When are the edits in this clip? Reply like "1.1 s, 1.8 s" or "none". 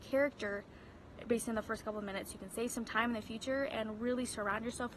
none